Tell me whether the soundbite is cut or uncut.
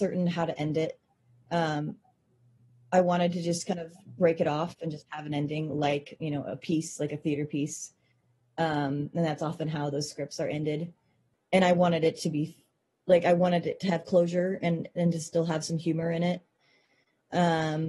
cut